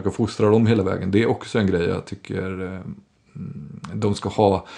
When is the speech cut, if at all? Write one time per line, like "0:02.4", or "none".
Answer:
none